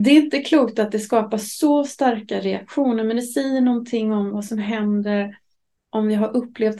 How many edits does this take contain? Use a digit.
0